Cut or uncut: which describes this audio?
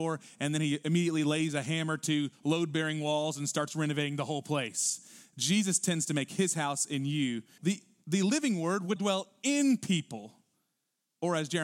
cut